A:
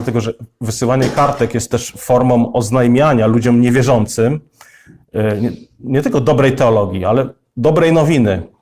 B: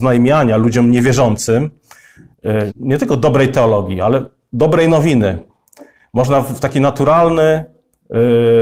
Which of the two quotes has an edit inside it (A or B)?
B